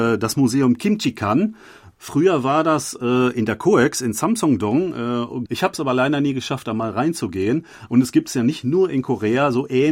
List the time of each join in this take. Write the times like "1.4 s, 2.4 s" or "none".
5.5 s, 7.9 s